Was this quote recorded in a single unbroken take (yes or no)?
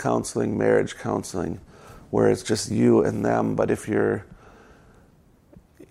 yes